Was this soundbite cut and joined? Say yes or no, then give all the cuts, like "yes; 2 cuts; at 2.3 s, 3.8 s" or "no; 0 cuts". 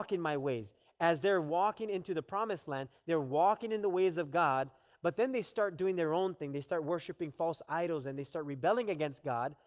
no; 0 cuts